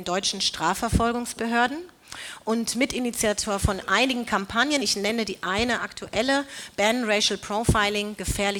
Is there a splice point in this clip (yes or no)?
no